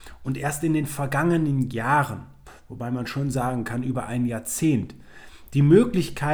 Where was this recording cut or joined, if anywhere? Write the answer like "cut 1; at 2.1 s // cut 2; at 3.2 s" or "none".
none